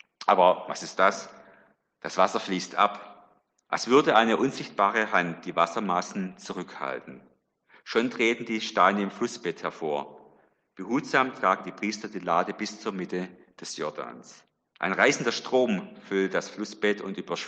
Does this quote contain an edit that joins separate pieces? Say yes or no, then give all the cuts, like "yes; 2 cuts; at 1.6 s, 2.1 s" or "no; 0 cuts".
yes; 2 cuts; at 3.7 s, 14.8 s